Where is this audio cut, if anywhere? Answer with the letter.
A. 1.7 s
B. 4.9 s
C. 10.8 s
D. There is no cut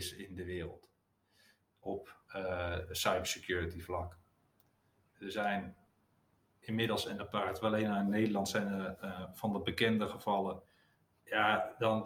D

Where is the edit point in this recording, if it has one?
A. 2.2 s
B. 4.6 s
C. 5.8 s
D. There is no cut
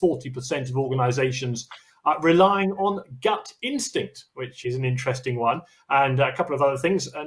B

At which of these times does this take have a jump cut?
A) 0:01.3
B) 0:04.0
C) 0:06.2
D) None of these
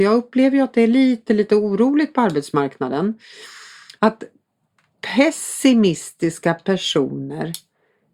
B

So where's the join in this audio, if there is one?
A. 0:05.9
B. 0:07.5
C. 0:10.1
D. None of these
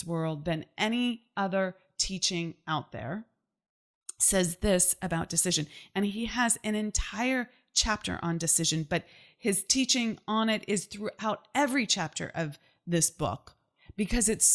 D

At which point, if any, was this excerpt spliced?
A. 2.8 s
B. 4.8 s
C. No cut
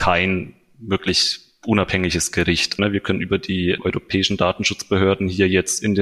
A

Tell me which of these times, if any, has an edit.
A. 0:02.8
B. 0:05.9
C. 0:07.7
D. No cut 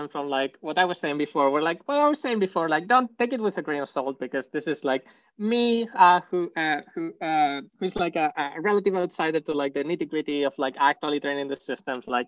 C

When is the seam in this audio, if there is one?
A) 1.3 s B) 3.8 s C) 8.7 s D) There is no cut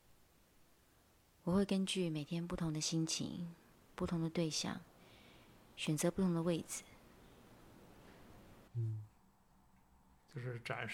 C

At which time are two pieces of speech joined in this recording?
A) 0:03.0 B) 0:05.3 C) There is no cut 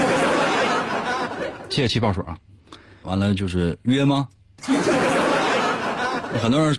A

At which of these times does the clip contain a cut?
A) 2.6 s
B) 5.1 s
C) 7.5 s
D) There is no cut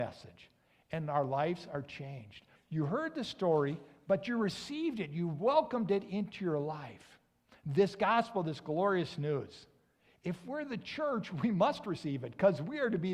A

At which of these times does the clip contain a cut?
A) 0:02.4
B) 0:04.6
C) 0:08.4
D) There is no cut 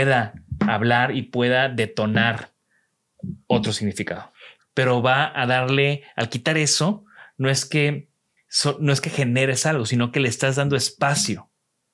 B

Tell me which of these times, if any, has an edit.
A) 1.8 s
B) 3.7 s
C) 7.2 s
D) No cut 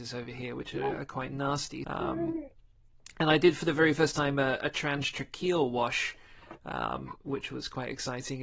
A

